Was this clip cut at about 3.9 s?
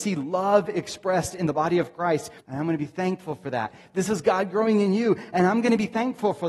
no; 1 cut; at 2.4 s

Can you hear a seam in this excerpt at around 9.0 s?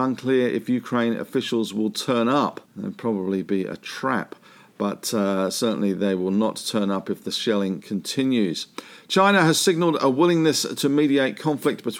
no; 1 cut; at 2.6 s

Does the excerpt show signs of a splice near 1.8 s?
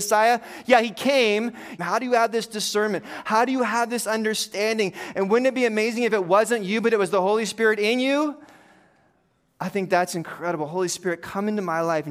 yes; 1 cut; at 1.8 s

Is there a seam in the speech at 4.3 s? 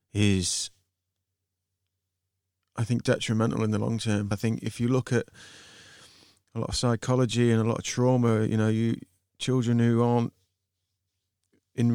yes; 1 cut; at 4.3 s

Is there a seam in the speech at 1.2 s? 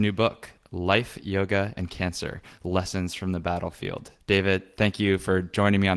no; 1 cut; at 4.2 s

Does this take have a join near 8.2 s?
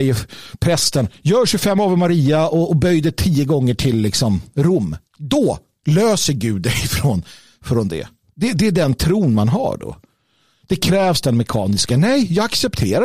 no; 1 cut; at 5.1 s

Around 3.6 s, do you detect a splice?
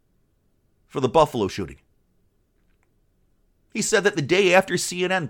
no; 0 cuts

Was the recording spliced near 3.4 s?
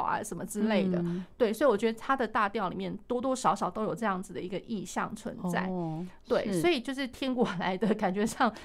no; 1 cut; at 1.3 s

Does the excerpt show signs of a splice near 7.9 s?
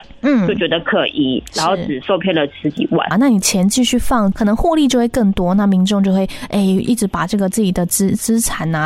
no; 2 cuts; at 3.1 s, 4.3 s

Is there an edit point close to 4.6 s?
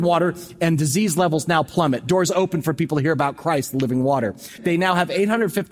yes; 1 cut; at 4.6 s

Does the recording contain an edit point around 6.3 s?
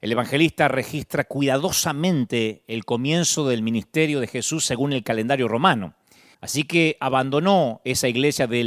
yes; 1 cut; at 6.3 s

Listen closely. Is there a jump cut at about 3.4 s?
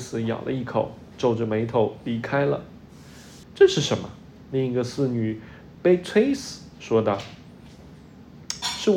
yes; 2 cuts; at 3.4 s, 5.7 s

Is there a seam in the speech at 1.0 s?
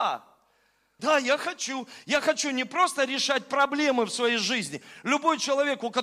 yes; 1 cut; at 1.0 s

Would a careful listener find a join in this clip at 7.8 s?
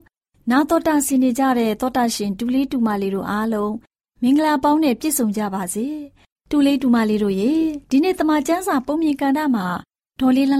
yes; 1 cut; at 7.8 s

